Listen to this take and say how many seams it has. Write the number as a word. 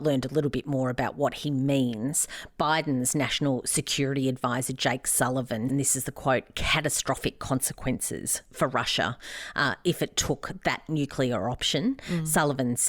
one